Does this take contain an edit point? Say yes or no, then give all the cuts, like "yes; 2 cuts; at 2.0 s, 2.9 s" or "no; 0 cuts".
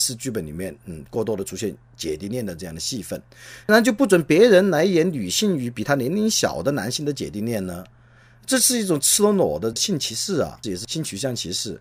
yes; 2 cuts; at 3.6 s, 10.6 s